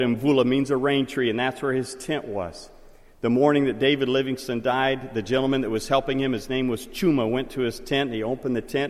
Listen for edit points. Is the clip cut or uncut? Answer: uncut